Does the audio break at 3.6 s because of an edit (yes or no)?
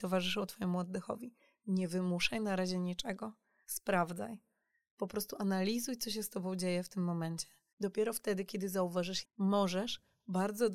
no